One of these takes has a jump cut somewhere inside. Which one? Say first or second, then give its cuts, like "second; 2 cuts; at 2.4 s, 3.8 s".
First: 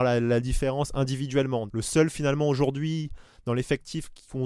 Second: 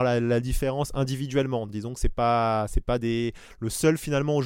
first; 1 cut; at 1.7 s